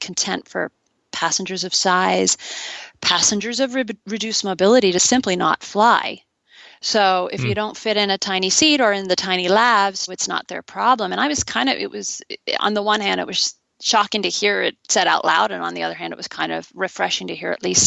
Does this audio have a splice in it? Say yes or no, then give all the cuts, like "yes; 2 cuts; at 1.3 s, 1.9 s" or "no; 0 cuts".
yes; 1 cut; at 10.1 s